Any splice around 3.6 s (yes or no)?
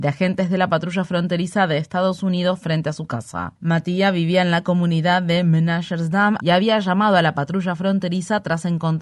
no